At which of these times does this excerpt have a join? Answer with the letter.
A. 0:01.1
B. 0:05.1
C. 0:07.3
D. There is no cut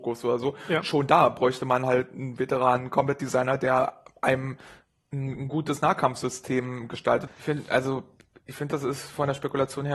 C